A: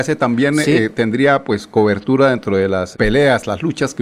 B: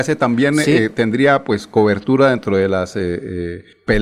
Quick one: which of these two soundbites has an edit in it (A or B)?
A